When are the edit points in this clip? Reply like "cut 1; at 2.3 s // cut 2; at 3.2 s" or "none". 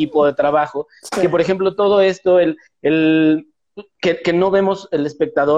none